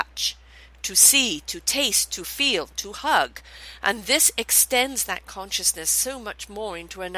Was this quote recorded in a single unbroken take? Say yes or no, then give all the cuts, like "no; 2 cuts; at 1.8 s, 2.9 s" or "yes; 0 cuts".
yes; 0 cuts